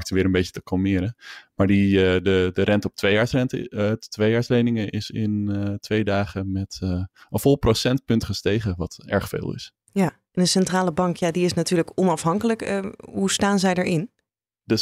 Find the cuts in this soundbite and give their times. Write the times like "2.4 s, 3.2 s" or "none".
none